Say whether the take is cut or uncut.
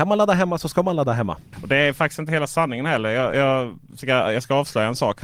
uncut